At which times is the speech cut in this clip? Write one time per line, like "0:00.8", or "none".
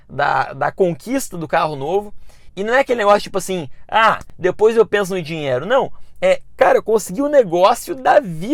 none